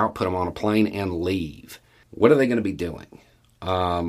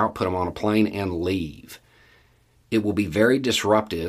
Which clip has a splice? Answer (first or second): first